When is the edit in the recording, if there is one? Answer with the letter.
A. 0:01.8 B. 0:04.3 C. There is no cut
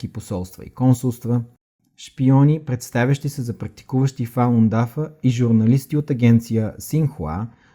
A